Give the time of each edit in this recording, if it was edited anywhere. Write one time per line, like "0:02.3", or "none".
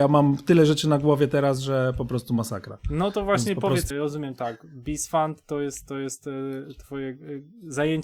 0:03.9